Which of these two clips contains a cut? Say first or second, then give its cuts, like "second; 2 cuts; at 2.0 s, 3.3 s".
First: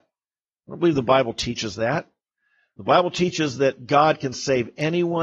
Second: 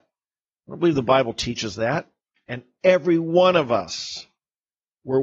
second; 1 cut; at 2.4 s